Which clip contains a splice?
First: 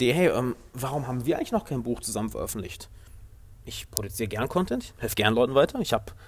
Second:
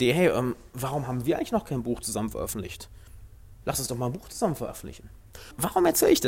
second; 1 cut; at 3.6 s

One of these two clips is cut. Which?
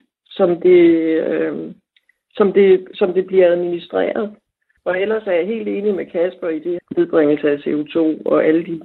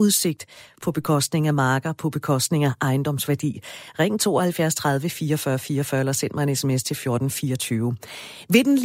first; 2 cuts; at 4.8 s, 6.8 s

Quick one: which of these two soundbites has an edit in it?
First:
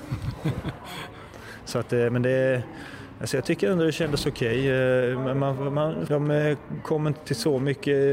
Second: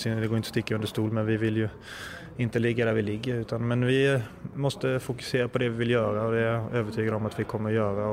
first; 1 cut; at 6.1 s

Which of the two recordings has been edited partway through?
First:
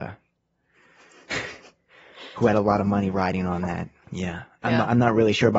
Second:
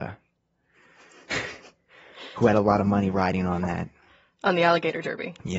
first; 1 cut; at 4.0 s

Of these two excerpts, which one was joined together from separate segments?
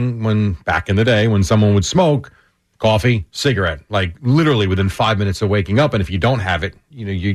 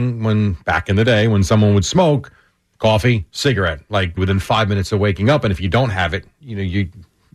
second; 1 cut; at 4.2 s

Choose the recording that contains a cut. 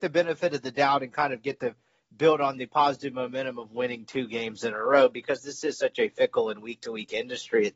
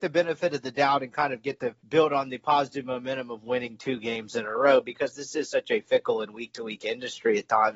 second; 1 cut; at 1.8 s

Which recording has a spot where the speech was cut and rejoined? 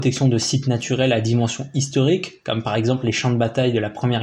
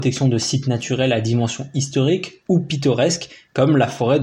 second; 1 cut; at 2.4 s

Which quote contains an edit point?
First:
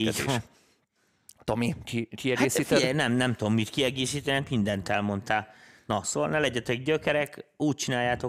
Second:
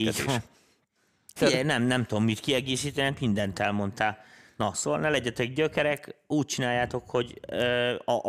second; 1 cut; at 1.4 s

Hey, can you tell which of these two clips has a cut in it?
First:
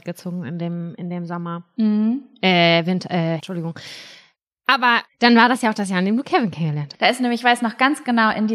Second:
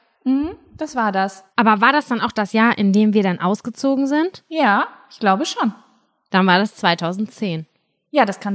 first; 2 cuts; at 3.4 s, 6.9 s

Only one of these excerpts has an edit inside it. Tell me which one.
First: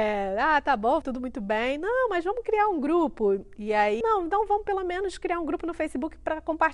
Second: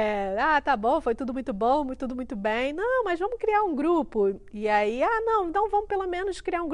first; 2 cuts; at 1.0 s, 4.0 s

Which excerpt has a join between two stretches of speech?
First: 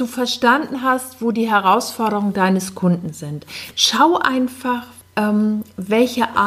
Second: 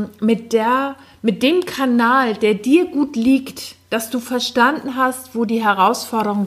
first; 2 cuts; at 3.7 s, 5.0 s

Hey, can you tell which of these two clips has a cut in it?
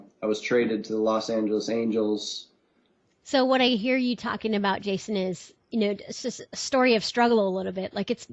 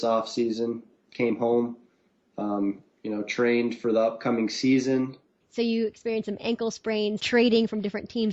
second; 2 cuts; at 5.4 s, 7.2 s

